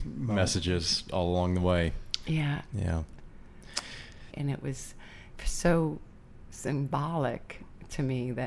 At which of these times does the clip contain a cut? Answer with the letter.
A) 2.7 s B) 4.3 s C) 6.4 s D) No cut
B